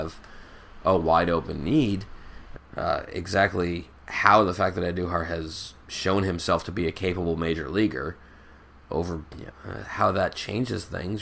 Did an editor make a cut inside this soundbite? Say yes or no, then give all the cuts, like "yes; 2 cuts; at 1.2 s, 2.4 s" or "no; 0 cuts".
yes; 3 cuts; at 2.6 s, 4.0 s, 9.5 s